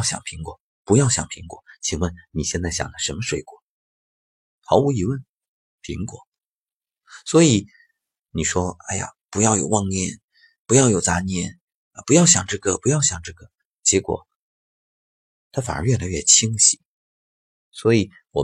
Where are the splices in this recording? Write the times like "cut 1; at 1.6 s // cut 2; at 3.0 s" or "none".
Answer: none